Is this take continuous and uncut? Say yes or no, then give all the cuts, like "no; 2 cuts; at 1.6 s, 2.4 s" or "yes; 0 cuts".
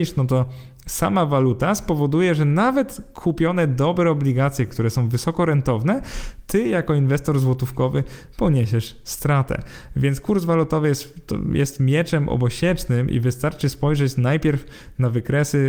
yes; 0 cuts